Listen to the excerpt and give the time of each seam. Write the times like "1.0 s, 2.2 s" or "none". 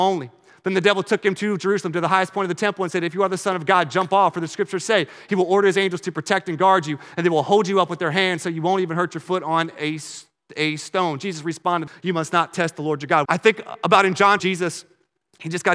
11.9 s, 13.3 s, 14.4 s

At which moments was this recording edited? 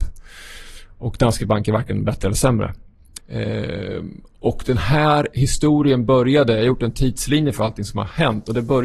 3.2 s

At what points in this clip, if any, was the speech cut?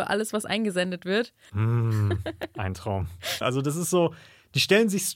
1.5 s, 3.4 s

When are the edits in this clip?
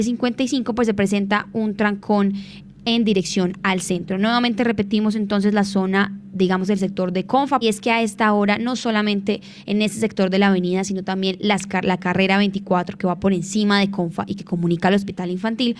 7.6 s

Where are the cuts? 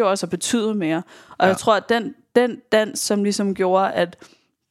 none

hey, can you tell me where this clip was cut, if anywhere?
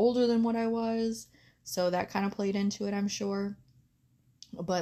none

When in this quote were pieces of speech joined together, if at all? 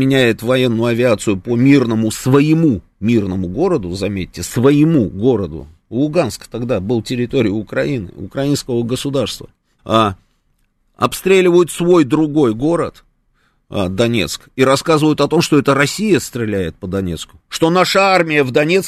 9.8 s, 17.5 s

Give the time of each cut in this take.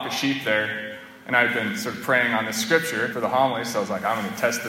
3.1 s

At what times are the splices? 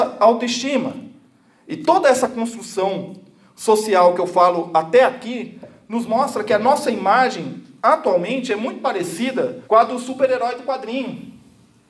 9.6 s

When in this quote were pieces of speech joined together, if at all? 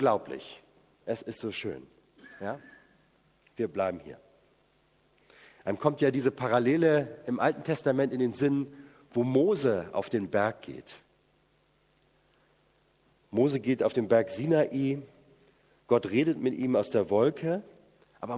1.0 s

